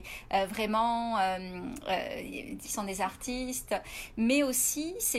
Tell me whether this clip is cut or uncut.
cut